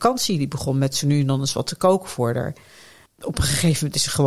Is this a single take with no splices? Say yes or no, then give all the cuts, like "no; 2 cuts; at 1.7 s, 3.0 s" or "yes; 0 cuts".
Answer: yes; 0 cuts